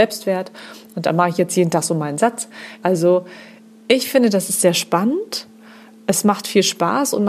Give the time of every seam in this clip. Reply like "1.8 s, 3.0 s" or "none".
2.8 s